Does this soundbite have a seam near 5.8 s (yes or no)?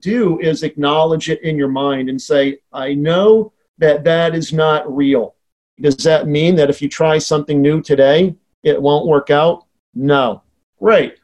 yes